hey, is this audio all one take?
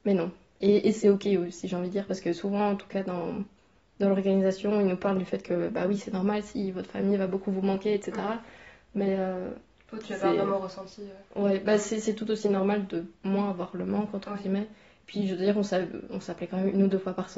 yes; 0 cuts

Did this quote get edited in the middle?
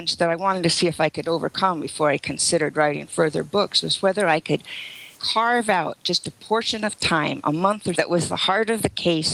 yes; 2 cuts; at 5.1 s, 7.9 s

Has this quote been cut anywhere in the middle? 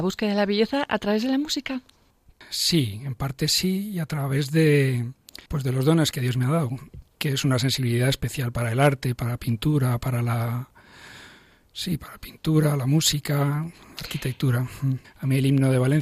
yes; 2 cuts; at 5.5 s, 15.0 s

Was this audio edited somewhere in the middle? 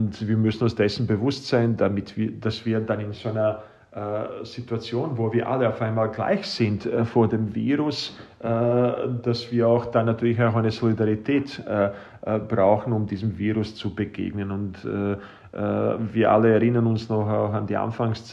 no; 0 cuts

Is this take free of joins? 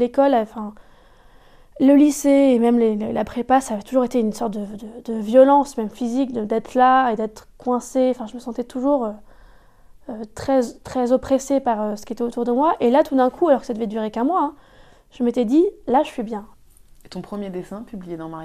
yes; 0 cuts

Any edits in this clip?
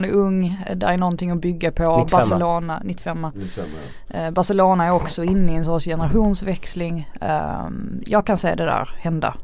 no; 0 cuts

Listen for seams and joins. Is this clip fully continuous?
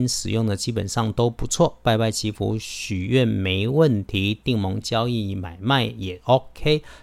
no; 1 cut; at 4.8 s

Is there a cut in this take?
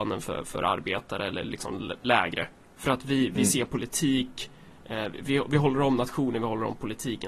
no; 0 cuts

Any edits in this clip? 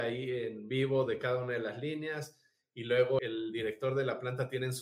yes; 1 cut; at 3.2 s

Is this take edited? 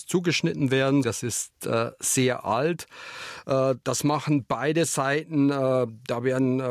yes; 1 cut; at 1.0 s

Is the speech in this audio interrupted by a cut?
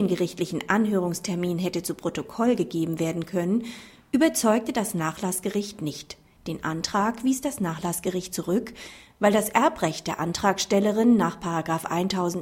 yes; 1 cut; at 6.4 s

